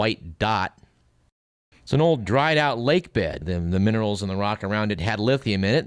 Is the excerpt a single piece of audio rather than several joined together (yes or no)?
no